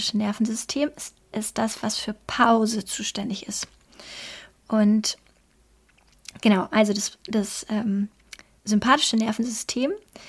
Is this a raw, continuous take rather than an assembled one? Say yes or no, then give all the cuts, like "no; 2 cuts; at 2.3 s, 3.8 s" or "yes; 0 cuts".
yes; 0 cuts